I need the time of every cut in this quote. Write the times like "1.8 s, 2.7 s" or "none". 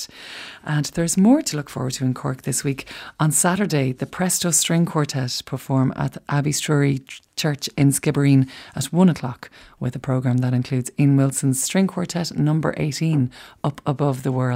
none